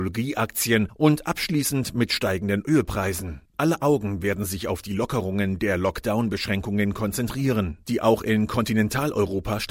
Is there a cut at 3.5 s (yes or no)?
yes